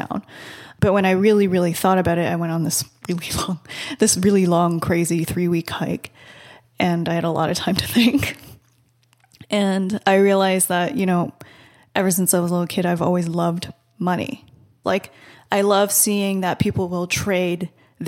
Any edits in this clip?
yes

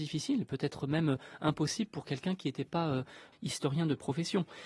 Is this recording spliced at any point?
yes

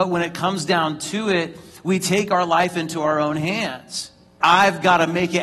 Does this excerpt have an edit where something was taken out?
yes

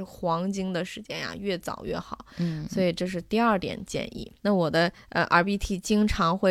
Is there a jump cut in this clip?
yes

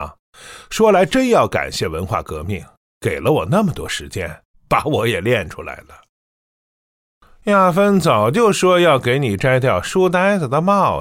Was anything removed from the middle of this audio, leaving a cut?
no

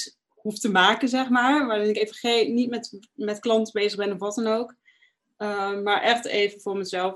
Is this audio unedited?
yes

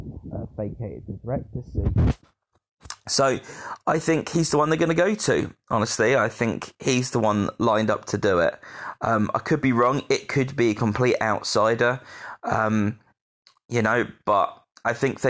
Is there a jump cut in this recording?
no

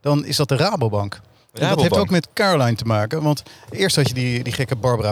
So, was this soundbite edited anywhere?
no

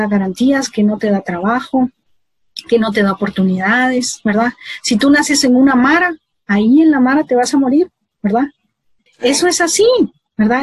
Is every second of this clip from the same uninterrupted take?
no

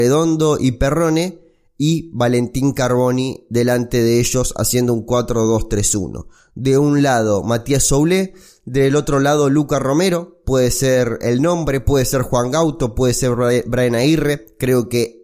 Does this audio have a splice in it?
no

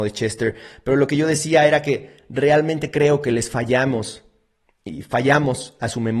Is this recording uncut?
yes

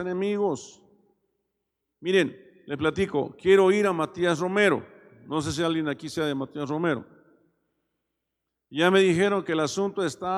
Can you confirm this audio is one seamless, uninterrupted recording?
yes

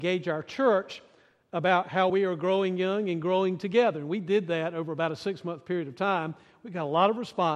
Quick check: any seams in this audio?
yes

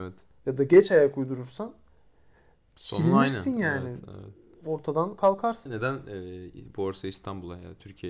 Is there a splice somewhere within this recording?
yes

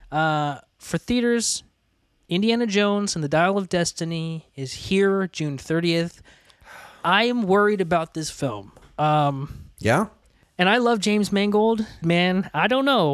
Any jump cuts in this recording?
yes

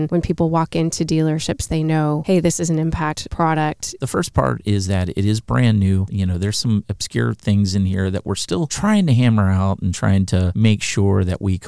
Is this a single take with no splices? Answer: no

